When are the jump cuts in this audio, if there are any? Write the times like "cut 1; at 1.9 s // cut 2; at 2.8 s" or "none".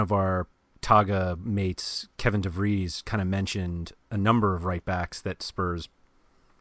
none